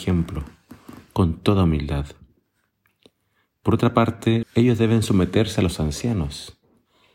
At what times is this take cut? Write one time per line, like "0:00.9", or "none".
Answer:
0:04.4